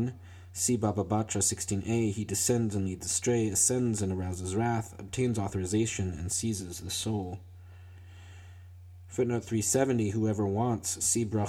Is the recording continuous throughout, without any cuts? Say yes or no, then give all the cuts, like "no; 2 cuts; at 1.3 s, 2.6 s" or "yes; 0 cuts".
yes; 0 cuts